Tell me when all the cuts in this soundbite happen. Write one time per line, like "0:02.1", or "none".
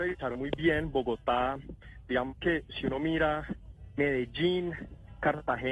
none